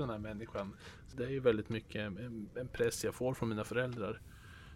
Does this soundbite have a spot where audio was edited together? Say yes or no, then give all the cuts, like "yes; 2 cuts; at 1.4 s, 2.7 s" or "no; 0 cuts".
no; 0 cuts